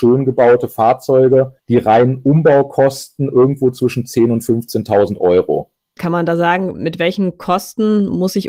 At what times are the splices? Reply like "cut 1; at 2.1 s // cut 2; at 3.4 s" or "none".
cut 1; at 1.6 s // cut 2; at 6.0 s